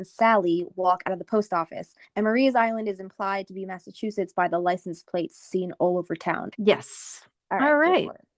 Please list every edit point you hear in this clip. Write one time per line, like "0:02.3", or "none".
0:06.5